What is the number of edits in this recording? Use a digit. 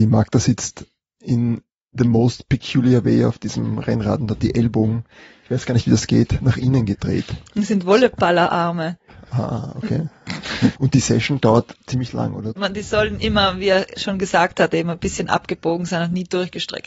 2